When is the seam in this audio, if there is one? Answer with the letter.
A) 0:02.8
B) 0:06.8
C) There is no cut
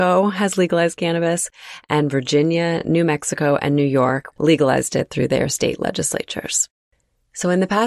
C